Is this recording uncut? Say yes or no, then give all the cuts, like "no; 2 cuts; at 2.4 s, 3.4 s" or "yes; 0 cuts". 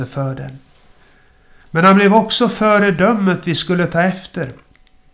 yes; 0 cuts